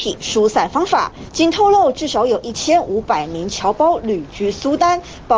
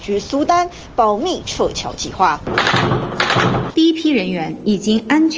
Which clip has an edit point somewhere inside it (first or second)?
second